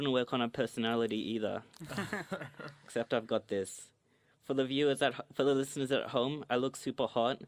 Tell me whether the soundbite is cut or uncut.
uncut